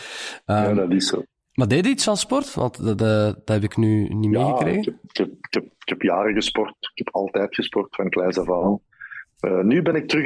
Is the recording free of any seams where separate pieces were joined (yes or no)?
yes